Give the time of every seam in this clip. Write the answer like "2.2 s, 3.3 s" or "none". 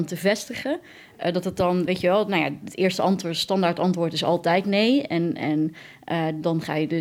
none